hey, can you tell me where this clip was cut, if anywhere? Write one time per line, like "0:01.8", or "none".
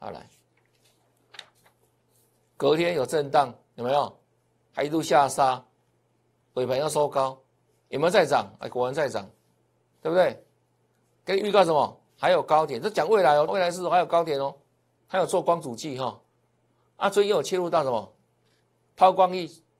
0:13.5
0:15.0

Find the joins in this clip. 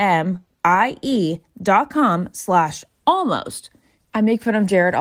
0:03.9

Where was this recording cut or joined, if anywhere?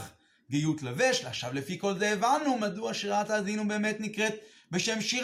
none

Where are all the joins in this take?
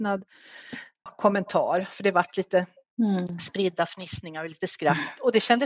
0:01.1

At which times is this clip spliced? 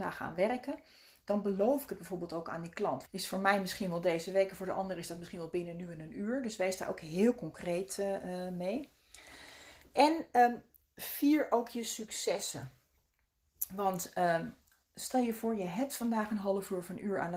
0:03.1

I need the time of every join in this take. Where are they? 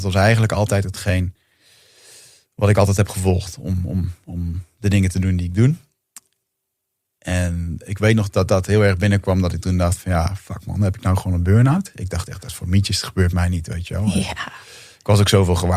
none

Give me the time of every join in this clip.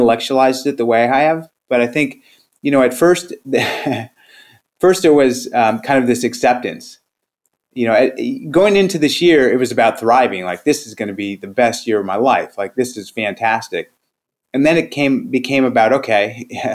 none

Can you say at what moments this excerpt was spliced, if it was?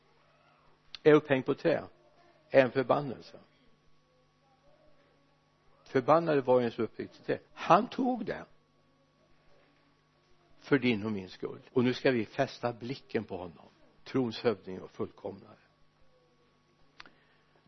0:07.5
0:11.7

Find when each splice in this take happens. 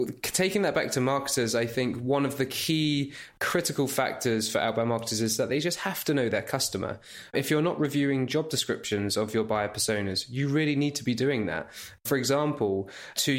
0:07.3

